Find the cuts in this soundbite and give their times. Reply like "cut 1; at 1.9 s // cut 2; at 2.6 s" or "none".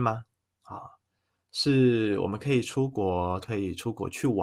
cut 1; at 3.4 s

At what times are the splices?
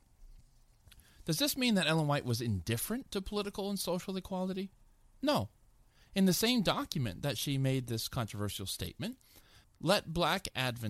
cut 1; at 9.6 s

